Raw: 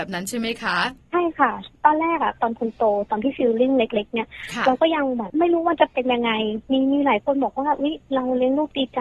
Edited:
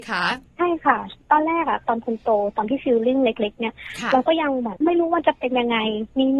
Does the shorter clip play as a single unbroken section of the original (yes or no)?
yes